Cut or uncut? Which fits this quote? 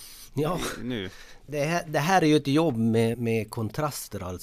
cut